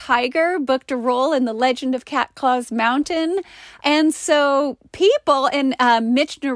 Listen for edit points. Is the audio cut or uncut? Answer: cut